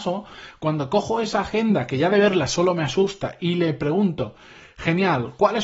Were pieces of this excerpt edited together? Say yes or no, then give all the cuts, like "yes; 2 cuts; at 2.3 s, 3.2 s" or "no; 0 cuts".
no; 0 cuts